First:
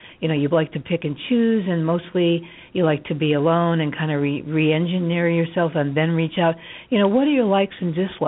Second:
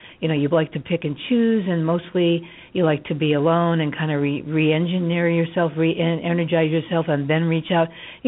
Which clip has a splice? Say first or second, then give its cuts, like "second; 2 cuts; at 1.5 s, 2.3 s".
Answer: first; 1 cut; at 5.7 s